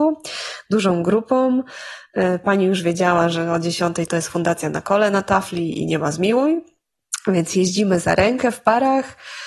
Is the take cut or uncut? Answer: uncut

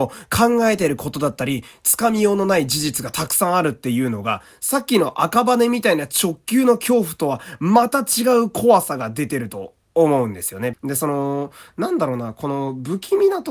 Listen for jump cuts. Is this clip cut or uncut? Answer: cut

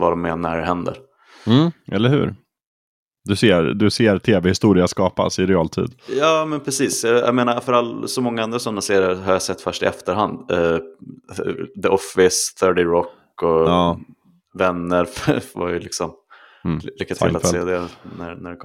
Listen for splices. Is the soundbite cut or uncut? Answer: uncut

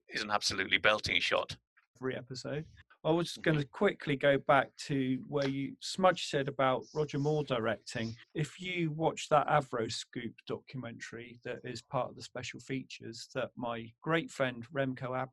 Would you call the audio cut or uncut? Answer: cut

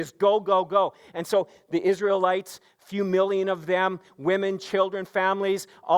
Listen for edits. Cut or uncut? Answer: uncut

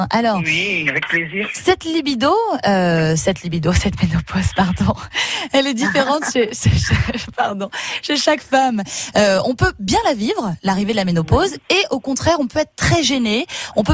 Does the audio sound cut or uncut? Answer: uncut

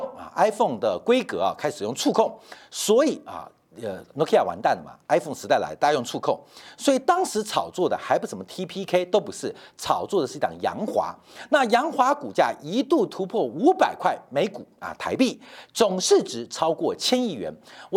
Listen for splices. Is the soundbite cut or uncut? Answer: uncut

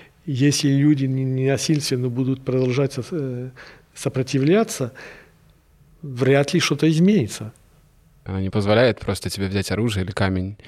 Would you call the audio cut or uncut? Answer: cut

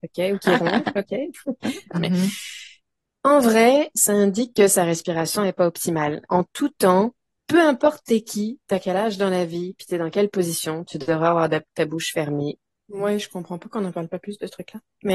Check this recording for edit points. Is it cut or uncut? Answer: cut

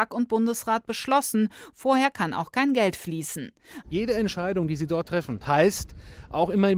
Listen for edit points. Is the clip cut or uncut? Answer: cut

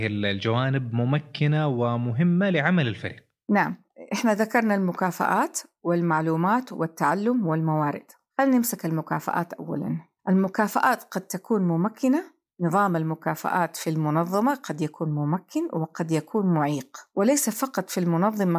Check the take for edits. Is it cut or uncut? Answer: uncut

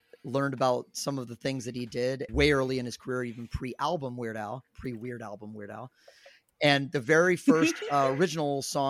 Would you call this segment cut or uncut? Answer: cut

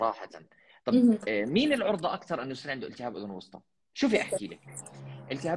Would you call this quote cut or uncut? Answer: cut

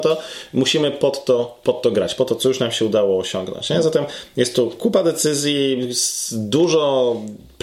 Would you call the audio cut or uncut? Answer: uncut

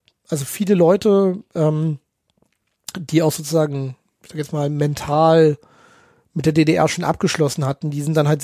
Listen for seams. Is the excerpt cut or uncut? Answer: uncut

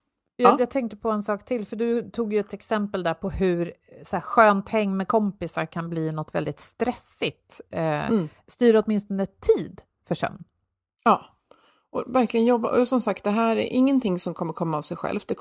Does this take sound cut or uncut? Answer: cut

